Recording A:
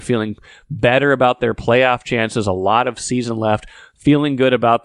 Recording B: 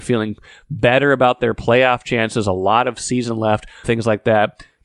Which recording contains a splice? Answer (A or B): B